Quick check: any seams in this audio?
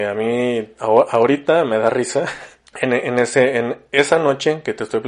yes; 1 cut; at 2.7 s

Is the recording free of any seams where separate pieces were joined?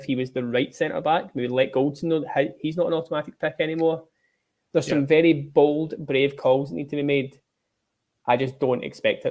yes; 0 cuts

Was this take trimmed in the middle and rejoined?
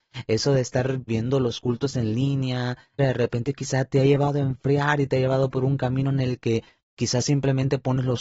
yes; 2 cuts; at 1.1 s, 3.0 s

